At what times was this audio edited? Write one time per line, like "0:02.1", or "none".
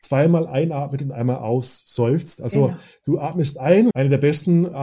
0:02.4
0:03.9